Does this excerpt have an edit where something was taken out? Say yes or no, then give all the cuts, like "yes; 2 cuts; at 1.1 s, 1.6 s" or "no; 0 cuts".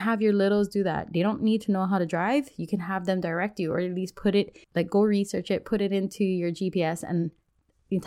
yes; 1 cut; at 4.6 s